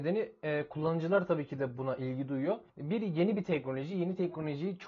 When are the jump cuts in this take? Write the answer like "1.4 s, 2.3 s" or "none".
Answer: 2.7 s

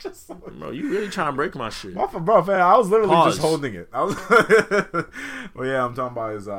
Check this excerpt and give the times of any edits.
none

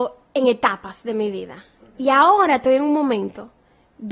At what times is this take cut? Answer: none

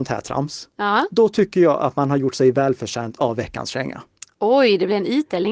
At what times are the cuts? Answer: none

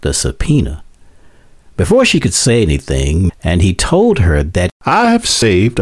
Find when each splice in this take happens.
3.3 s

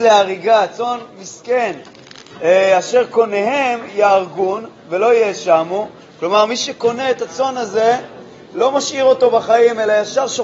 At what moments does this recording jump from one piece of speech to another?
none

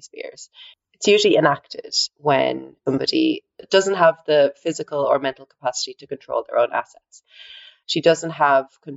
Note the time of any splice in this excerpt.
7.8 s

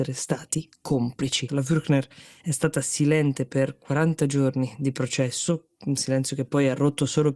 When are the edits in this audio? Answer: 1.5 s

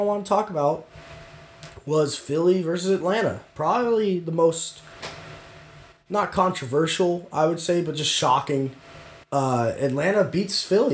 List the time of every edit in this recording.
9.2 s

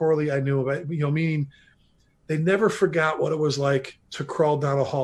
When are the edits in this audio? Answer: 4.0 s

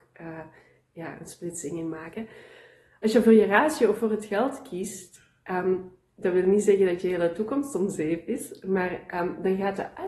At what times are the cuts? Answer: none

